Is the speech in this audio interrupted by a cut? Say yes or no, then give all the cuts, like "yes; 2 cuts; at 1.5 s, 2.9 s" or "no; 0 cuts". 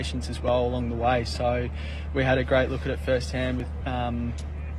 yes; 1 cut; at 3.8 s